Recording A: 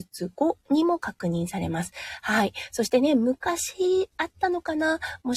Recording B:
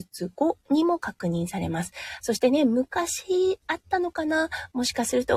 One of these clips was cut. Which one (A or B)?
B